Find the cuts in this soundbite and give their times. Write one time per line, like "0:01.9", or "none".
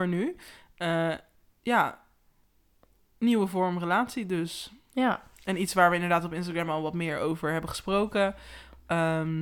none